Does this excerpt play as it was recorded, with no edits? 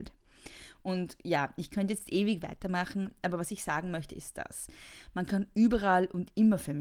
yes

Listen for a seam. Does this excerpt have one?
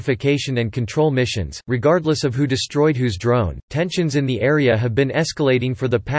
yes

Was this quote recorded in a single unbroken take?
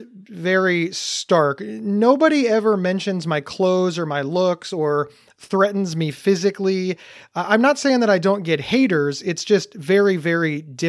yes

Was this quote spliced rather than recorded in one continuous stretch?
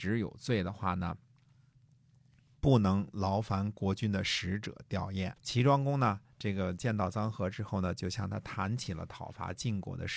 yes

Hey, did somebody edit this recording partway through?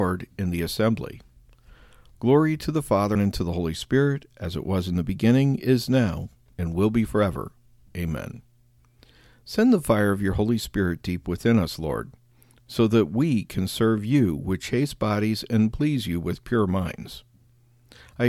yes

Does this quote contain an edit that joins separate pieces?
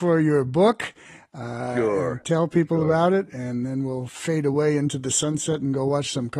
no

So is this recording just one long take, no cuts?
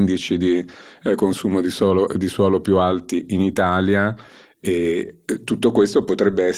yes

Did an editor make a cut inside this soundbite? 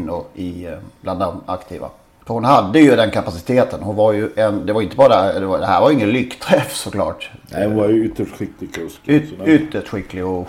no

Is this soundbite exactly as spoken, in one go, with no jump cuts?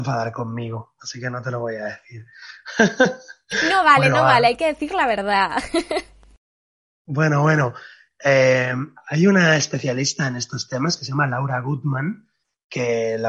yes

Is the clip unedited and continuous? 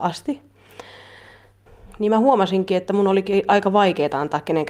yes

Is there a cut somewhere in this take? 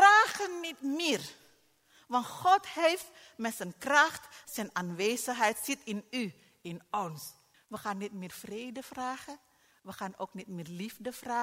yes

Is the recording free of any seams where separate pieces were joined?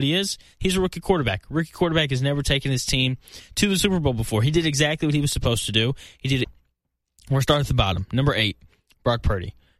no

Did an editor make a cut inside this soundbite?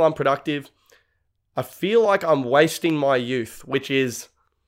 no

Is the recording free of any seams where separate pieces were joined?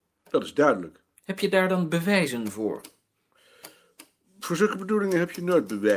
yes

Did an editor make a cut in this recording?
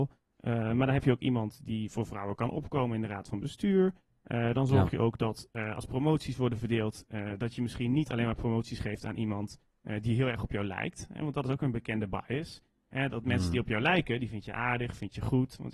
no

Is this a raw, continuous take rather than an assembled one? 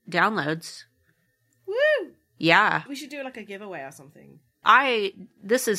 no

